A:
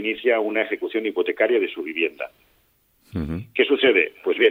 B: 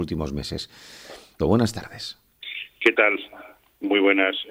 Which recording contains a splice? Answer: B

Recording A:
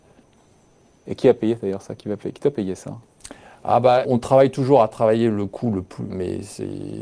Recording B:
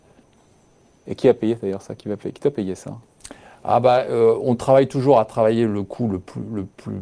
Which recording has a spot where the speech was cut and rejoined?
A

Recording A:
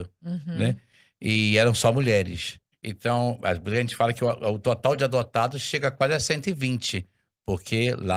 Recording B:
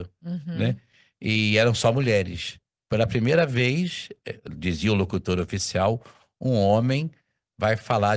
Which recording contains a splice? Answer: A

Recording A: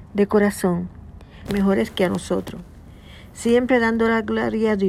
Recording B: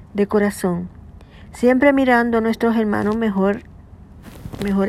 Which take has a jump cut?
A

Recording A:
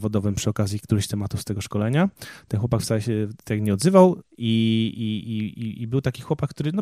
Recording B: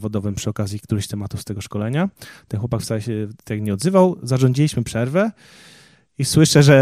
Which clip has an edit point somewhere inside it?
A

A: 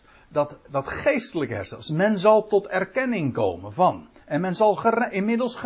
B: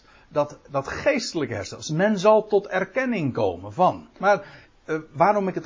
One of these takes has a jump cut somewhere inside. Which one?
B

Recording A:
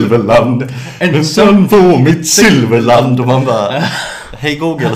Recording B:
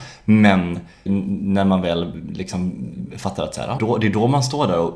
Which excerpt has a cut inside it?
B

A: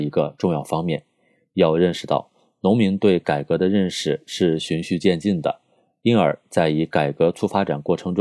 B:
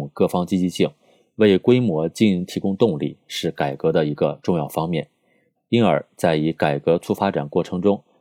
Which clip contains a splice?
B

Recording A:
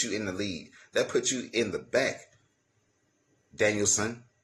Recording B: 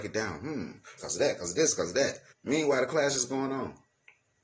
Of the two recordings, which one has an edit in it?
B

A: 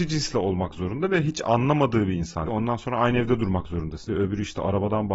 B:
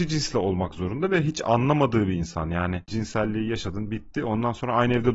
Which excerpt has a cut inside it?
A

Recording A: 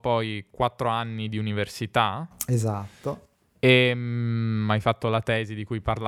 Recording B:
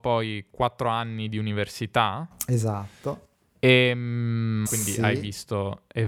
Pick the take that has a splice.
B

